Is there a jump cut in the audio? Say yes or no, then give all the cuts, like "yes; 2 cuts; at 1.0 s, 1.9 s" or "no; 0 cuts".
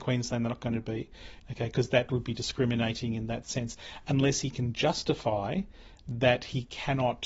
yes; 1 cut; at 1.4 s